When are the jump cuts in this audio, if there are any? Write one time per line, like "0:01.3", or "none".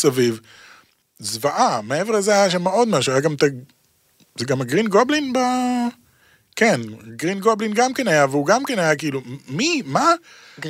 none